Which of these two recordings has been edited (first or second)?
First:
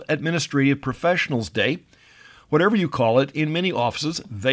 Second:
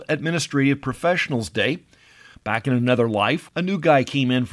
second